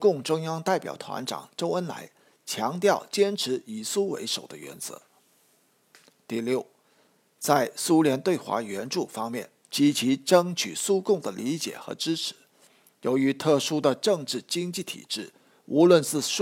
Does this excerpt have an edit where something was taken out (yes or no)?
yes